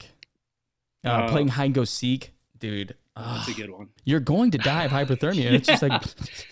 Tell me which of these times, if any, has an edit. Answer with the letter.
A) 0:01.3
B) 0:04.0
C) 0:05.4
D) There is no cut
B